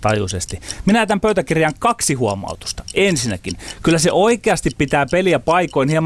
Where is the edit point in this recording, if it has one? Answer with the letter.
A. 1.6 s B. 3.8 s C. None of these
C